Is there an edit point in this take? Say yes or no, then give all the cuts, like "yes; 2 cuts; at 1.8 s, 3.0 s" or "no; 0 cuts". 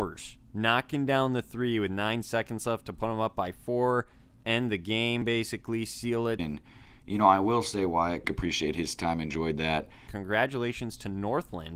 yes; 3 cuts; at 6.4 s, 8.2 s, 10.1 s